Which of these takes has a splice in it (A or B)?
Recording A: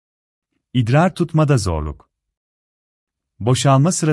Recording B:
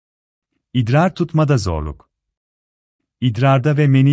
B